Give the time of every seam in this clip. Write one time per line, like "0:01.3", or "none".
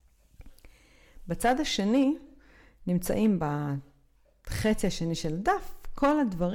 none